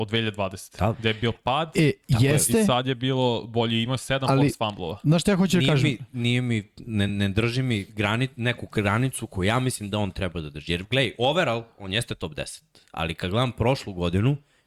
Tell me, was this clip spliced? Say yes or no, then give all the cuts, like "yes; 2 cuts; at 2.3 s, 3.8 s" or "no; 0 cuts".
no; 0 cuts